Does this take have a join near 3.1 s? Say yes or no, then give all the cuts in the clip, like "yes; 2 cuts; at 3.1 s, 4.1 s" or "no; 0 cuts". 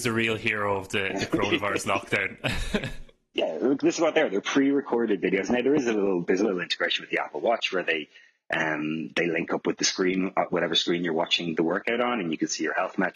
no; 1 cut; at 11.5 s